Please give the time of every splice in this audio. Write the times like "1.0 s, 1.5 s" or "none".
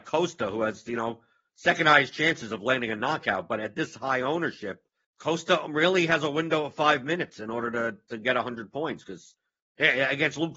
5.0 s